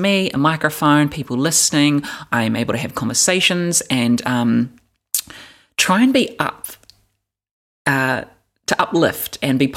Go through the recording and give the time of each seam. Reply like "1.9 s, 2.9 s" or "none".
none